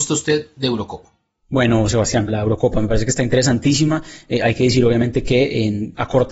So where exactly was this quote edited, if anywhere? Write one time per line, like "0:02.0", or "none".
0:02.3